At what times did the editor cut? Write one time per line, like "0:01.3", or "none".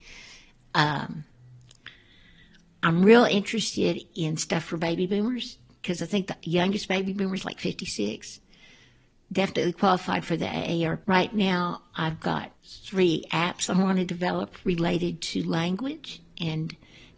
0:11.0
0:12.6